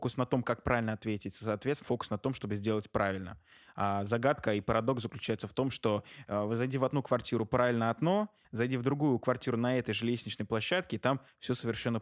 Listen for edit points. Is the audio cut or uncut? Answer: cut